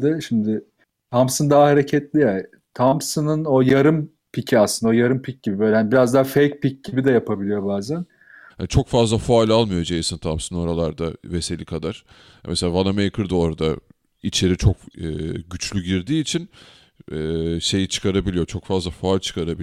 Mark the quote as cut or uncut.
cut